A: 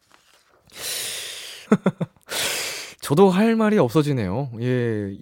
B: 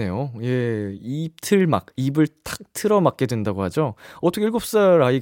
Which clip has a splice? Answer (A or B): A